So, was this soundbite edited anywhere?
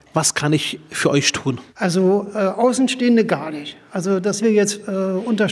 yes; 1 cut; at 1.7 s

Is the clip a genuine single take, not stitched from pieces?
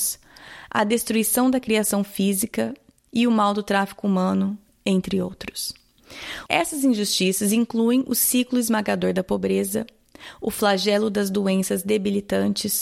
no; 1 cut; at 6.5 s

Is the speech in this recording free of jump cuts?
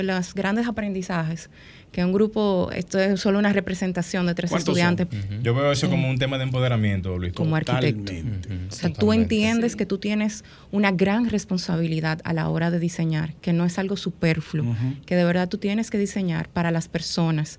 no; 2 cuts; at 5.1 s, 7.3 s

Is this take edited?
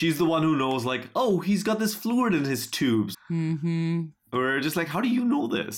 yes; 1 cut; at 3.1 s

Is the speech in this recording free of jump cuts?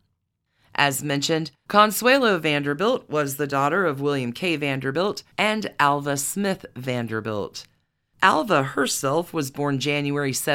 no; 1 cut; at 5.3 s

